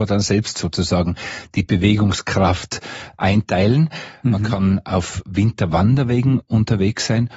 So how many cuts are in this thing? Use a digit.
1